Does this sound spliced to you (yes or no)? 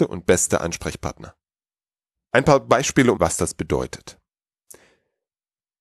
yes